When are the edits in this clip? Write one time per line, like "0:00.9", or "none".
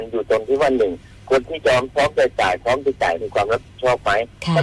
0:03.2